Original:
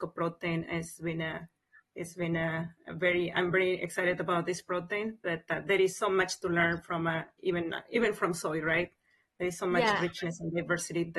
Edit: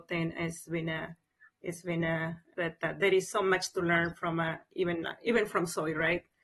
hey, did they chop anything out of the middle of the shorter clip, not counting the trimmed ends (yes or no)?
yes